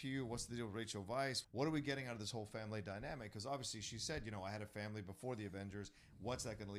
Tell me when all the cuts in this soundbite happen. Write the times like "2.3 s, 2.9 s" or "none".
1.4 s